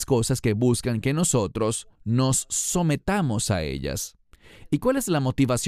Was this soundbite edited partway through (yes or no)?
yes